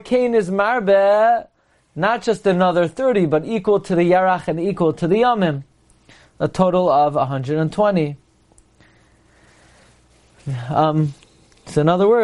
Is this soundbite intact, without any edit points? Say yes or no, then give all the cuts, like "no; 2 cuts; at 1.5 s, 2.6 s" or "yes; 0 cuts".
yes; 0 cuts